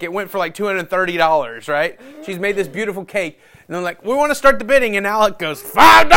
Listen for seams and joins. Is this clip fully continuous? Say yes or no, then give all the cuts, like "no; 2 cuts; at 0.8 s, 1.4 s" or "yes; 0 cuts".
yes; 0 cuts